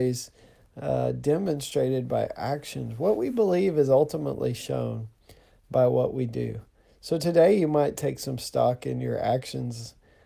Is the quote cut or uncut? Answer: uncut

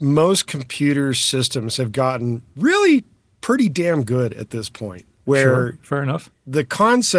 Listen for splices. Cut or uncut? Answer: uncut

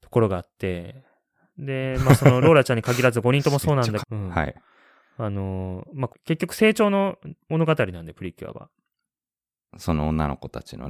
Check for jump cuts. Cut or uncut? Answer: cut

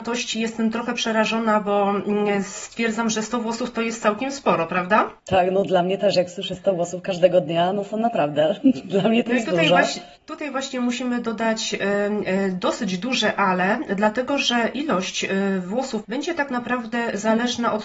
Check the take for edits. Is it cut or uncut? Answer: cut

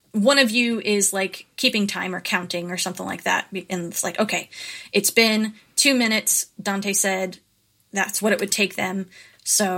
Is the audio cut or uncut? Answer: uncut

